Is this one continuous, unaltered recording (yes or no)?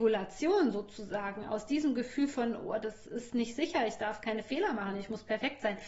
yes